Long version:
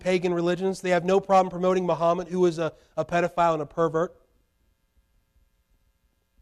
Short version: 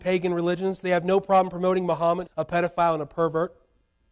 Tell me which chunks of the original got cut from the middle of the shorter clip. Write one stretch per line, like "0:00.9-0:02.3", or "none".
0:02.3-0:02.9